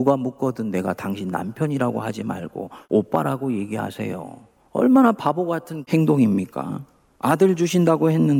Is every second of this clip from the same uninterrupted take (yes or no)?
yes